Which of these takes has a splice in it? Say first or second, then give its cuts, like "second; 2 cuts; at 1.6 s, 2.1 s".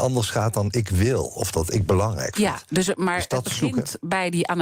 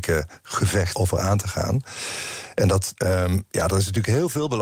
second; 2 cuts; at 0.9 s, 2.9 s